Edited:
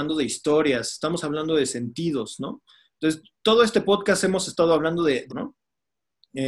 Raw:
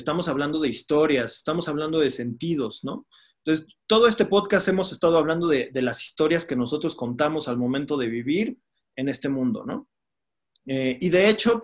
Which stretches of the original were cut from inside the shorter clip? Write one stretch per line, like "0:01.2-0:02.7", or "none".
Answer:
0:05.7-0:09.6